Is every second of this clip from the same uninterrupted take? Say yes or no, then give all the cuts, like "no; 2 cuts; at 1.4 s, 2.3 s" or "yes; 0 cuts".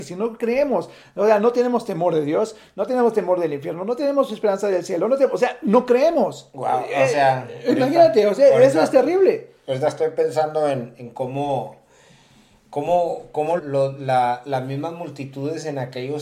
no; 1 cut; at 13.6 s